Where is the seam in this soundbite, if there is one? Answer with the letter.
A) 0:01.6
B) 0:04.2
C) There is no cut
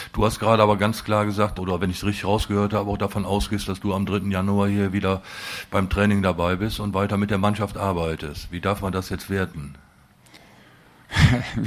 A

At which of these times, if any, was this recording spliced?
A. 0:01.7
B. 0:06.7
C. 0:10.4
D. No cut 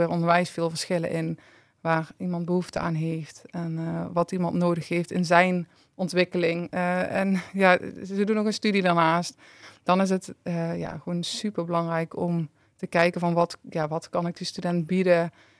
B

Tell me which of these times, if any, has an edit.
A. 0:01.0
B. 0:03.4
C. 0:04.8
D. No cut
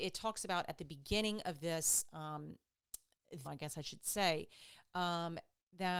B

